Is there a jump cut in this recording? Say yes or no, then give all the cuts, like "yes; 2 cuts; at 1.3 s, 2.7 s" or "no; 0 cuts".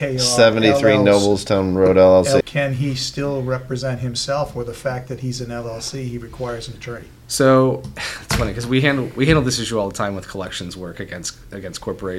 yes; 1 cut; at 2.4 s